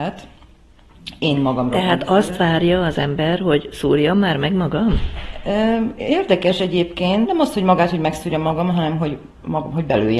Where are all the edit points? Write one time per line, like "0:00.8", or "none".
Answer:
0:07.2